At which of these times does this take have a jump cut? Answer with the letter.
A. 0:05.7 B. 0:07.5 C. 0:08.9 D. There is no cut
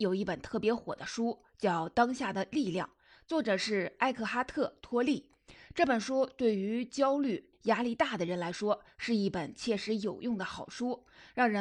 B